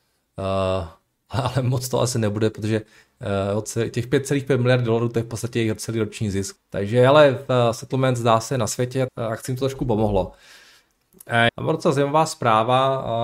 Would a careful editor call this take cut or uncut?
cut